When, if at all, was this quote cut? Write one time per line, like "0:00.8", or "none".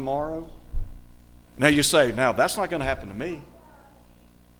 0:01.4